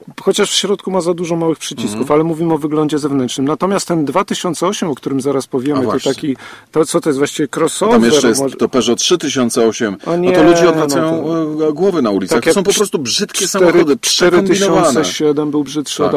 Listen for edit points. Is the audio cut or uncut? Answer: uncut